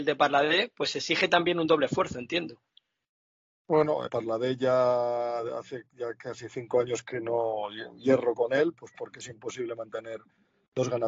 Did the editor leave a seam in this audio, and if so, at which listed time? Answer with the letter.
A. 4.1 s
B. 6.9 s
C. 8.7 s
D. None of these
A